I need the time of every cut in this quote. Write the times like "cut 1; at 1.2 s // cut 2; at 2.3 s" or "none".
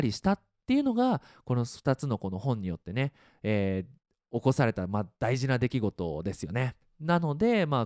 cut 1; at 6.8 s

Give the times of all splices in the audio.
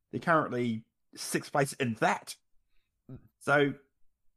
cut 1; at 3.3 s

